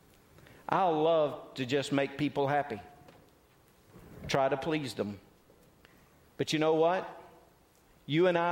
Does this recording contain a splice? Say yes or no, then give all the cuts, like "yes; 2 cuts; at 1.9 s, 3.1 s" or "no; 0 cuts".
no; 0 cuts